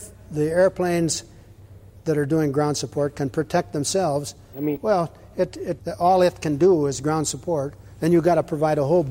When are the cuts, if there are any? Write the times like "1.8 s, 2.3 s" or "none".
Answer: 4.5 s, 5.8 s